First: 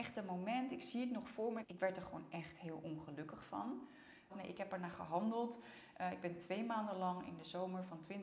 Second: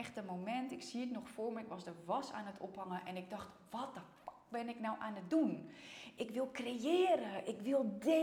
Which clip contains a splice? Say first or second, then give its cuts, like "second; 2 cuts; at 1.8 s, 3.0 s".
first; 2 cuts; at 1.6 s, 4.3 s